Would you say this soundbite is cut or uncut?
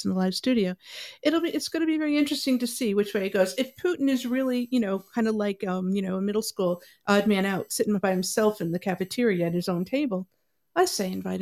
uncut